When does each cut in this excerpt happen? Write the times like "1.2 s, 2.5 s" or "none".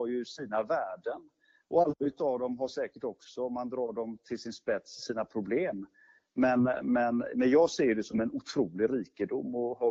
none